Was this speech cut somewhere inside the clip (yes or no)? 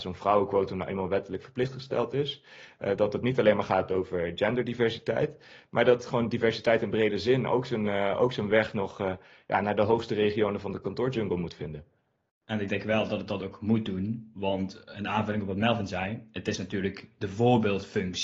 no